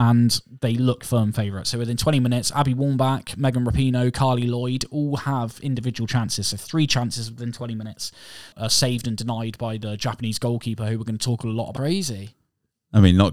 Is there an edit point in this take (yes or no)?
yes